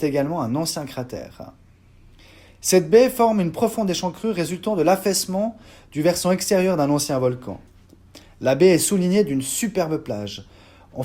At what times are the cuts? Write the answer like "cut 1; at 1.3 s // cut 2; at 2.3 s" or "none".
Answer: none